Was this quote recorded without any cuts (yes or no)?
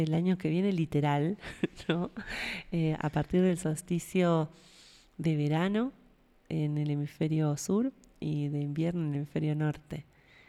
yes